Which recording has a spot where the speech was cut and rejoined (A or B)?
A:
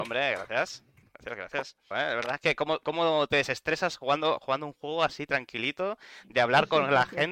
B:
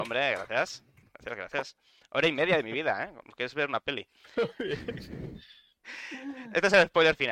A